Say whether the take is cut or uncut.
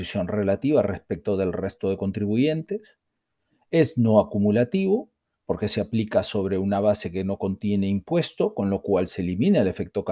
uncut